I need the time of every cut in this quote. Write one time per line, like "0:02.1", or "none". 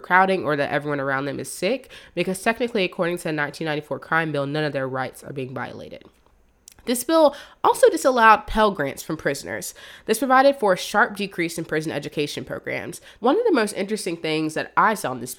0:13.2